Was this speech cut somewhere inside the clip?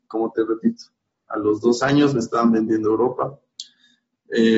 no; 0 cuts

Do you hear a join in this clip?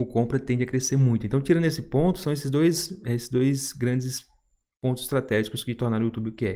no; 0 cuts

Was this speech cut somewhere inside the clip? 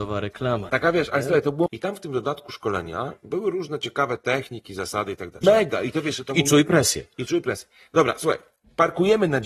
yes; 2 cuts; at 1.7 s, 5.4 s

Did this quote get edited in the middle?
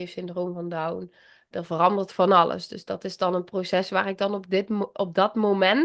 yes; 1 cut; at 1.5 s

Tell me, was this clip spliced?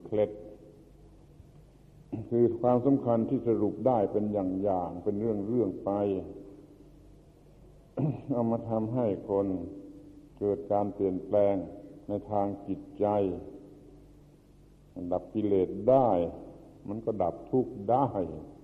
yes; 2 cuts; at 10.3 s, 12.0 s

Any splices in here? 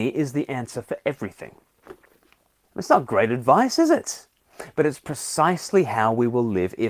yes; 1 cut; at 2.6 s

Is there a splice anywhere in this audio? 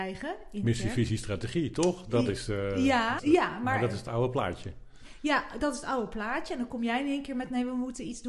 yes; 1 cut; at 3.2 s

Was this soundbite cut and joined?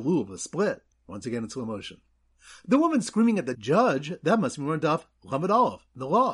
yes; 1 cut; at 3.5 s

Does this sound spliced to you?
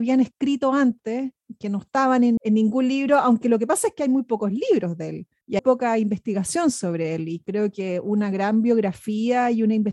yes; 2 cuts; at 2.4 s, 5.6 s

